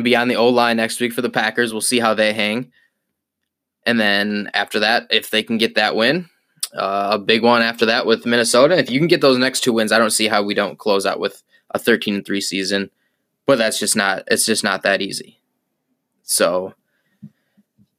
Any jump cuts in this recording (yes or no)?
no